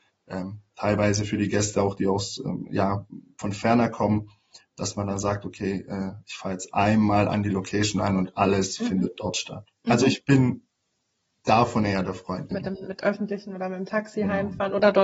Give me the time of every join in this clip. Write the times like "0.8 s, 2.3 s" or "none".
9.8 s, 12.5 s